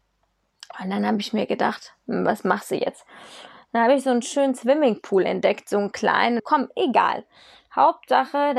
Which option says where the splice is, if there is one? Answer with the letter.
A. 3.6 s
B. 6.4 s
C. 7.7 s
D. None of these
B